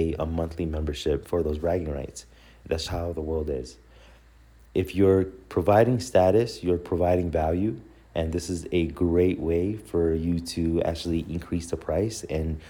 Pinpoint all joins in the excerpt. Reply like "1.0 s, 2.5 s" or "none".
1.2 s, 2.8 s